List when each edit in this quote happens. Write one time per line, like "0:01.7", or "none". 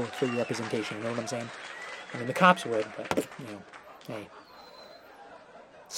none